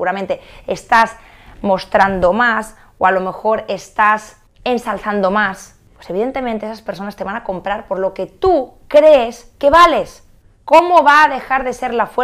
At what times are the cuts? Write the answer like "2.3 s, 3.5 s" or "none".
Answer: 10.6 s